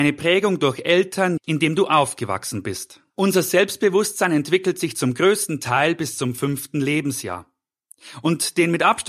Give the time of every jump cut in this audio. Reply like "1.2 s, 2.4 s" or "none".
1.4 s, 3.1 s